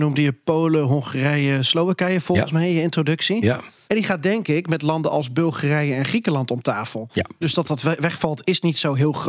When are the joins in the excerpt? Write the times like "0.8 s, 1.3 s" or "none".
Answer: 3.9 s, 7.4 s